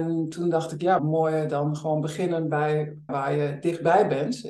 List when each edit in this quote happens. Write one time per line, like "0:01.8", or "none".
0:01.0
0:03.1